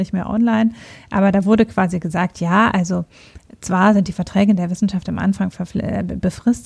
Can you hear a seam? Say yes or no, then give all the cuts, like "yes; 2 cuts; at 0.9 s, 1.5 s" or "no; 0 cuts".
no; 0 cuts